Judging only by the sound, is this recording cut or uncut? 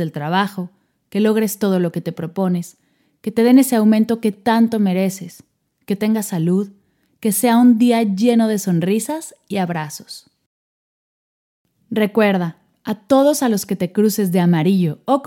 cut